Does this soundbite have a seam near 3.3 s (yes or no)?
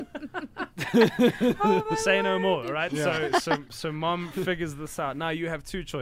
no